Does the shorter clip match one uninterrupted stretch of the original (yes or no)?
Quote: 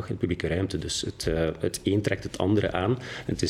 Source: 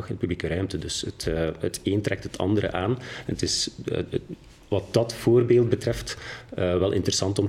yes